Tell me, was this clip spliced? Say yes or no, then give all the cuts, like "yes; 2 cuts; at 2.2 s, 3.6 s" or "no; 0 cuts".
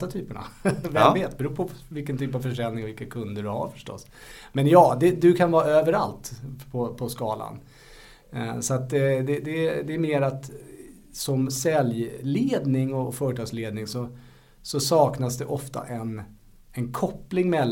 no; 0 cuts